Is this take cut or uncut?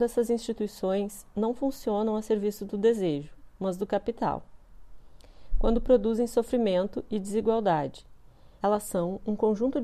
cut